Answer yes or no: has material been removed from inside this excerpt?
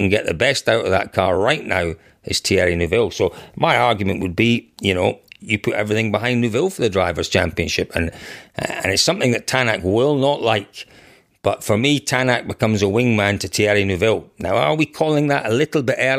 no